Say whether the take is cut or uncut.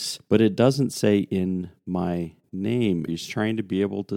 cut